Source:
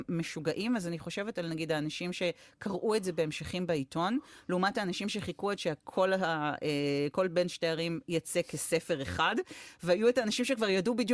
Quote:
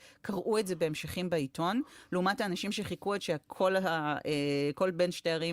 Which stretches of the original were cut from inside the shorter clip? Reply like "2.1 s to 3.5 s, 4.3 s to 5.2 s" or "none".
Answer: none